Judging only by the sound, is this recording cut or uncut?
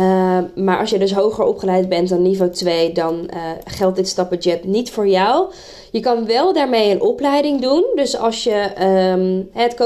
uncut